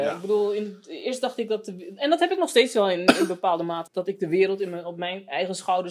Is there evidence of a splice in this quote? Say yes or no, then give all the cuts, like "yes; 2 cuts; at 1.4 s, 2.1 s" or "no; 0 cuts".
yes; 1 cut; at 3.9 s